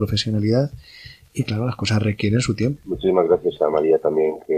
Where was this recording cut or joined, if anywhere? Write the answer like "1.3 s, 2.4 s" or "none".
2.8 s